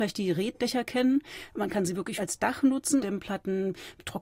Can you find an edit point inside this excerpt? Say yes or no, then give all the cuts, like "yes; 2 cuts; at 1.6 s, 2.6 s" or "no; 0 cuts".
yes; 1 cut; at 3.0 s